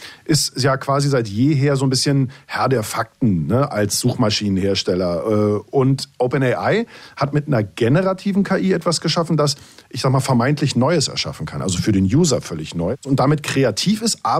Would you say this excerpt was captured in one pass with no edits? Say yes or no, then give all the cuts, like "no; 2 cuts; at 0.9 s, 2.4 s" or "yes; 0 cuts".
yes; 0 cuts